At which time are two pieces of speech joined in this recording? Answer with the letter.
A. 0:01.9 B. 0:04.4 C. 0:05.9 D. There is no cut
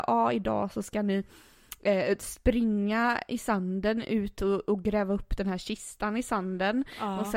D